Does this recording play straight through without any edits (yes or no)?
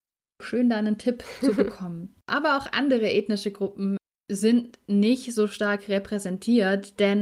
no